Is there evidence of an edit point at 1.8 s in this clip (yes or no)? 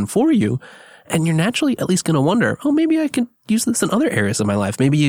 yes